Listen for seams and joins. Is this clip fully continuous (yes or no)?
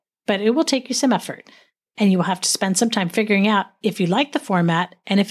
yes